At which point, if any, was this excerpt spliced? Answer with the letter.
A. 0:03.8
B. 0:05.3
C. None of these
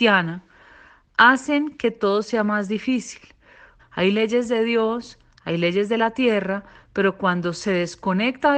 A